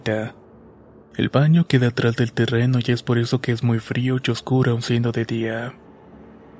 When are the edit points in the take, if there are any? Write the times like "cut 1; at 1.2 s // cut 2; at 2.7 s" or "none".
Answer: cut 1; at 1.0 s